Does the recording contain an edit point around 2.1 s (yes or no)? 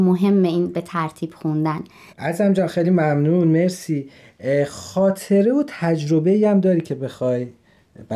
yes